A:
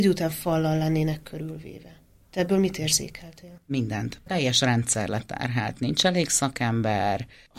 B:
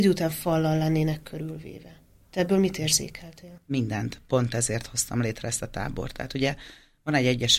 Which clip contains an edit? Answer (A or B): A